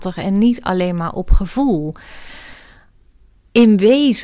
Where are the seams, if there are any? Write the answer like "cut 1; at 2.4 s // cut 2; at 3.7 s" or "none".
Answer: none